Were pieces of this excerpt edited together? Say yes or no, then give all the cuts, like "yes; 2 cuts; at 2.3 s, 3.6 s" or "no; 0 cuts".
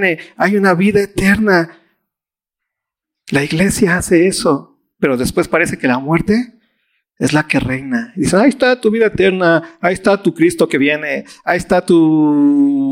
no; 0 cuts